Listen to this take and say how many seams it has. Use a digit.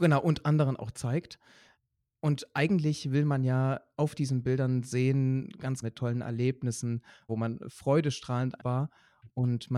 3